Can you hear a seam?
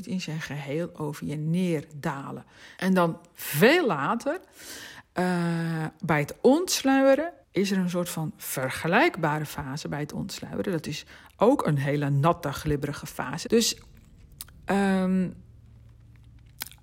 yes; 3 cuts; at 2.8 s, 7.4 s, 13.4 s

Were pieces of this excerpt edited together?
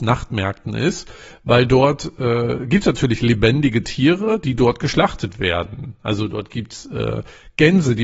no; 0 cuts

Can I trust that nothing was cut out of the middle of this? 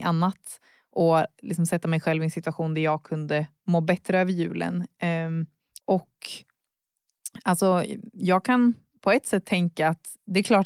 no; 1 cut; at 5.8 s

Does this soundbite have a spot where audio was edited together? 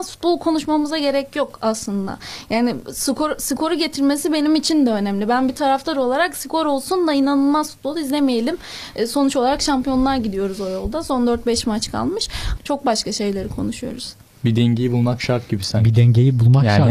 yes; 1 cut; at 12.6 s

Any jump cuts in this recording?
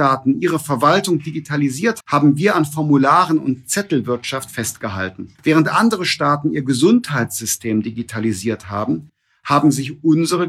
yes; 2 cuts; at 2.0 s, 5.4 s

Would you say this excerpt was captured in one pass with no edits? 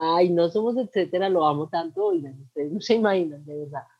yes; 0 cuts

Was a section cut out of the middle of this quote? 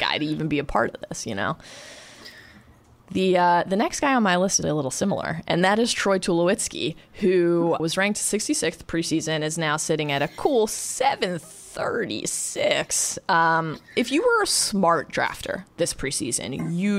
yes; 2 cuts; at 4.6 s, 7.8 s

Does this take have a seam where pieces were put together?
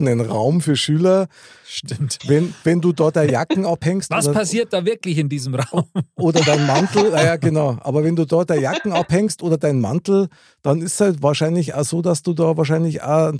no; 0 cuts

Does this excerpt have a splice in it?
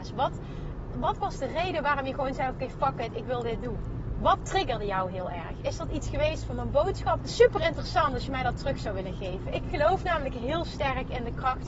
yes; 2 cuts; at 0.9 s, 7.2 s

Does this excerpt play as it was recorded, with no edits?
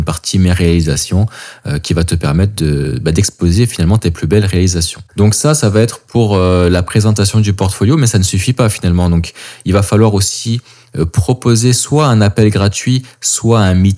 yes; 0 cuts

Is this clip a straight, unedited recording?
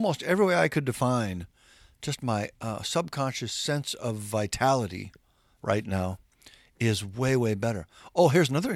yes; 0 cuts

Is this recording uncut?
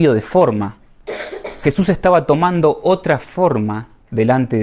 yes; 0 cuts

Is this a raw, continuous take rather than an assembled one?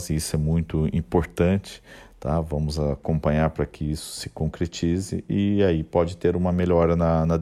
yes; 0 cuts

